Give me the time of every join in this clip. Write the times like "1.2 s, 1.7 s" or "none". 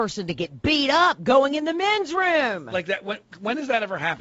none